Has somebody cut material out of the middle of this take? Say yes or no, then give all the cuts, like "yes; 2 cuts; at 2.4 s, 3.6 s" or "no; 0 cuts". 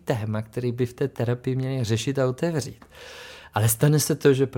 no; 0 cuts